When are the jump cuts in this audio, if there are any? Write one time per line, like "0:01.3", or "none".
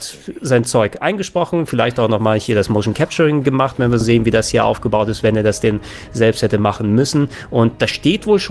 0:04.0